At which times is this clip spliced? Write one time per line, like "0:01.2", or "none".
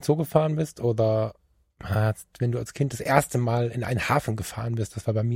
0:02.3